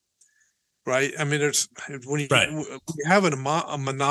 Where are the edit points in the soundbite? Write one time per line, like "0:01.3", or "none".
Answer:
none